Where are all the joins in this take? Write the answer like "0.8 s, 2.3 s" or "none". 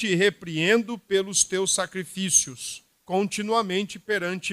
3.0 s